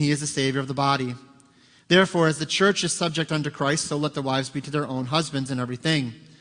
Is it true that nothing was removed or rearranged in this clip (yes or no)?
yes